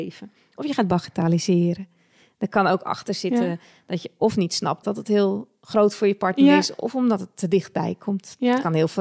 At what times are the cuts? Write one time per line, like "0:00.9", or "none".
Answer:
0:04.8